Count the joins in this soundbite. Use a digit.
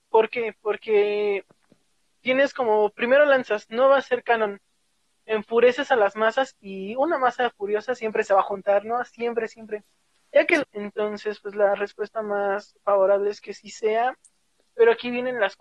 1